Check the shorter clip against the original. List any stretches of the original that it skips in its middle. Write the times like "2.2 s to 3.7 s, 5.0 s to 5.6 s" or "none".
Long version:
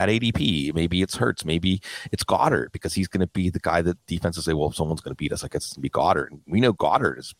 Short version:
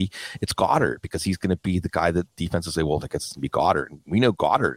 4.7 s to 5.4 s